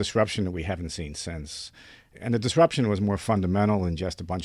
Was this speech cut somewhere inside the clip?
no; 0 cuts

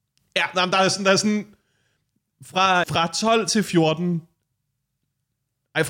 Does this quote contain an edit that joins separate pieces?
yes; 1 cut; at 2.8 s

